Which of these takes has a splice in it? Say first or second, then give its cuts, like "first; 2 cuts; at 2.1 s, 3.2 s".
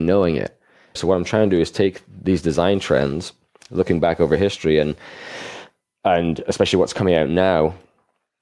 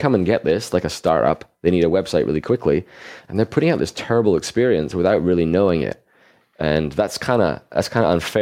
first; 1 cut; at 1.0 s